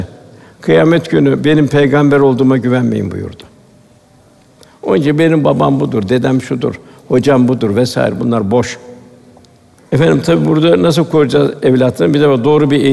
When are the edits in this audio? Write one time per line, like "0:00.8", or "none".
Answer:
none